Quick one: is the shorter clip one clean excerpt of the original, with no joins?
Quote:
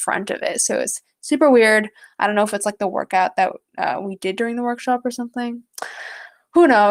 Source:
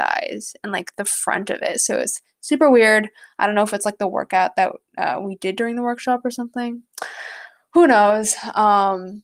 yes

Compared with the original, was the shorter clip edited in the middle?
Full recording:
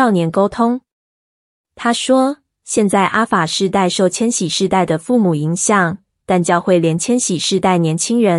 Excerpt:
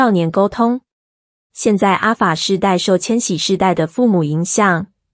yes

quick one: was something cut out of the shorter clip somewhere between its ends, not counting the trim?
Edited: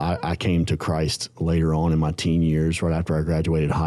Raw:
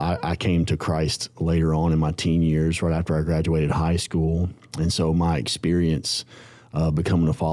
no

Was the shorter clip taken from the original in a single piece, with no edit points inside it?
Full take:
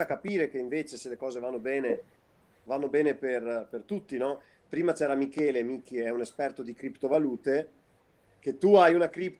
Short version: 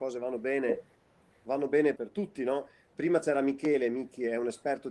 no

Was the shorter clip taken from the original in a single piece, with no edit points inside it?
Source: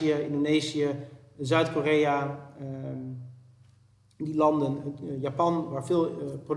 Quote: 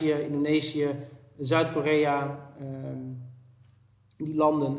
yes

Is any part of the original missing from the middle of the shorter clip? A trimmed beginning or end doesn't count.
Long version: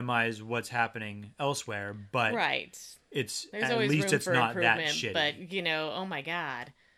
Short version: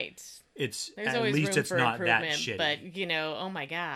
no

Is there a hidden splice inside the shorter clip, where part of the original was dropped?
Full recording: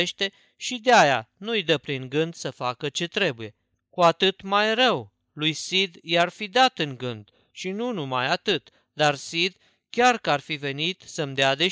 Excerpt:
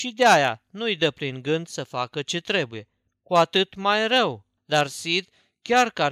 yes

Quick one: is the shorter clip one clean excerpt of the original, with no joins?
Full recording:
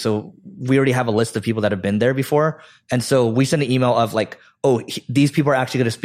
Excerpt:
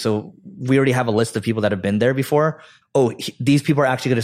no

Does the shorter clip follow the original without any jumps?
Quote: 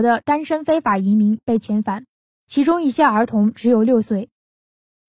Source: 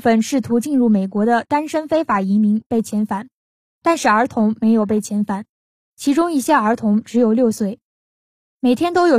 no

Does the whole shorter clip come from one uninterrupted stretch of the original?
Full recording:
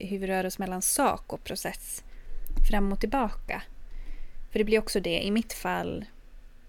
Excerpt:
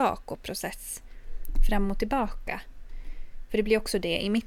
yes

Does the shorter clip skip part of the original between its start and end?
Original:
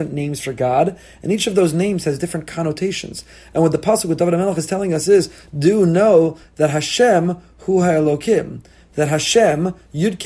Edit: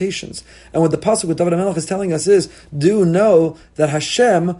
no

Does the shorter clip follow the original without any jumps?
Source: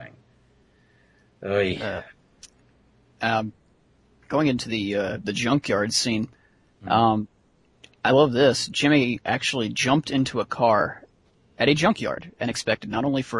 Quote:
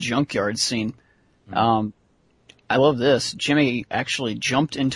yes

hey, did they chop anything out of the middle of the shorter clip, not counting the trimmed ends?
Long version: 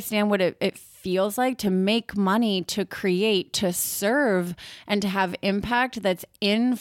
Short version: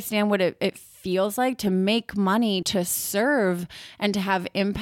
yes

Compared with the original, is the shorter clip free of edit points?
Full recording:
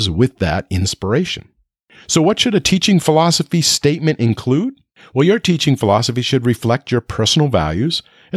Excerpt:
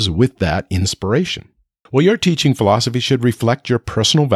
no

